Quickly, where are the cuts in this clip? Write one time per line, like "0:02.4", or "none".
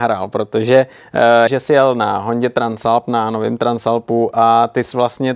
0:01.5